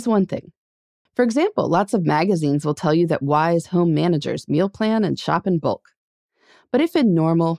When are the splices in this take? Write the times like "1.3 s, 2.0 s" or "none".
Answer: 1.1 s